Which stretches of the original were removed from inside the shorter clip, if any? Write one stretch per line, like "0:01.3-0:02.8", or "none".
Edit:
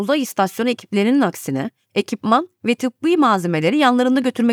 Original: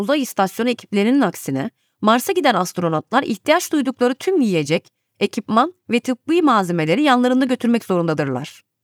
0:01.8-0:05.1